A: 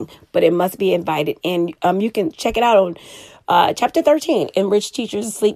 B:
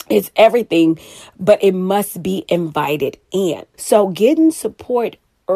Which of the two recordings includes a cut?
B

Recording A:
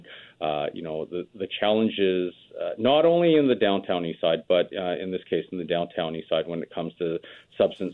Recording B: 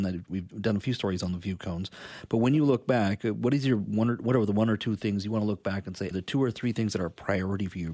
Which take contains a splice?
B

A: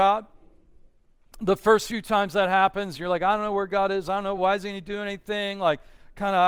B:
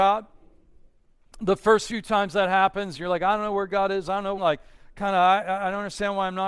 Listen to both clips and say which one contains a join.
B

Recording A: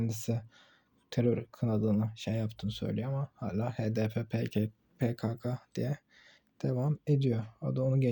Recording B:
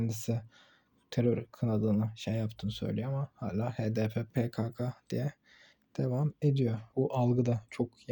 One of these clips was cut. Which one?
B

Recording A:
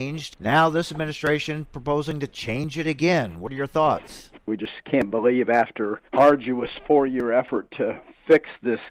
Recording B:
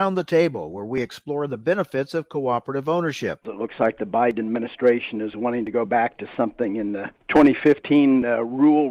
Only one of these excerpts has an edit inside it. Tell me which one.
B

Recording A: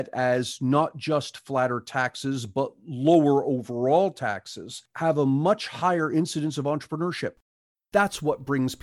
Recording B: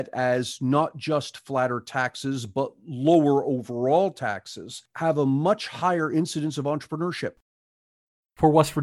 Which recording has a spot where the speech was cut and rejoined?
A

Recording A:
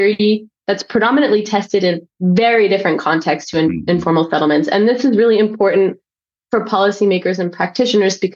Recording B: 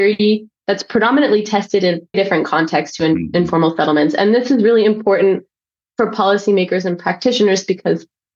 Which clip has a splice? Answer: B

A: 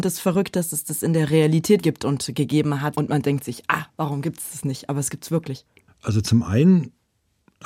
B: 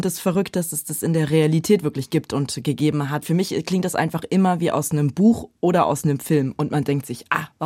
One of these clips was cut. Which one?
A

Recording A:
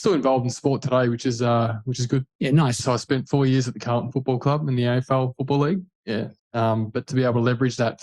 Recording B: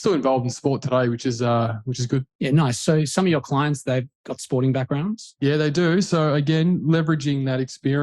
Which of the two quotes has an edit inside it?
A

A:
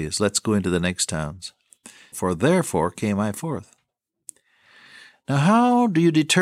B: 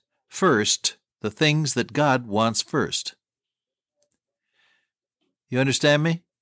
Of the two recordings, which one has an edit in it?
A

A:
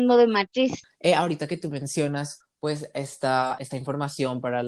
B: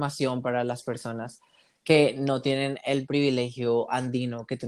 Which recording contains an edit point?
A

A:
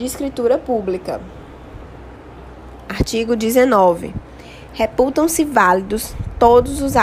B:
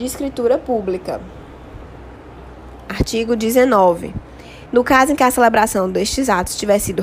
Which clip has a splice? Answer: B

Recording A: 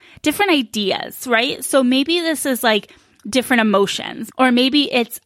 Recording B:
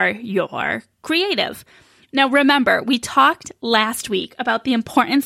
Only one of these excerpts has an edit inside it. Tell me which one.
A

